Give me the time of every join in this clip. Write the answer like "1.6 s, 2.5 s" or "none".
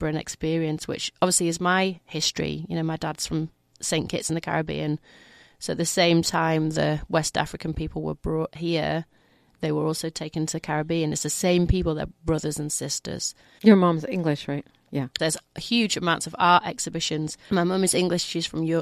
13.6 s, 15.2 s, 17.5 s